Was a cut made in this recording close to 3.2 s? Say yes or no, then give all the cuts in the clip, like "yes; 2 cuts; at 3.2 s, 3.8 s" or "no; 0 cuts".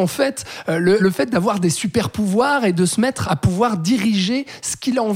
yes; 2 cuts; at 1.0 s, 3.2 s